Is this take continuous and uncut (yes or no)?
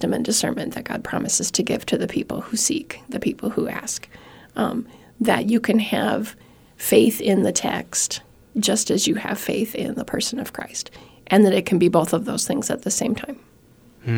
yes